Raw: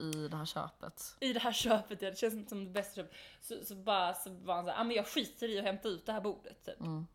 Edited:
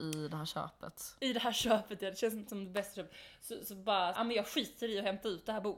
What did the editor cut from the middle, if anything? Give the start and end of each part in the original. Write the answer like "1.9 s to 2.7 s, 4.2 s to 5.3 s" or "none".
4.1 s to 4.7 s